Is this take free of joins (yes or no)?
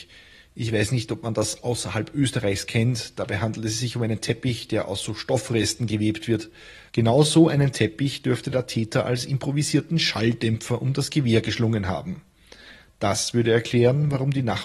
no